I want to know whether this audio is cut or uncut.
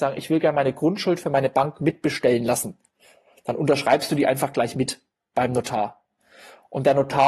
uncut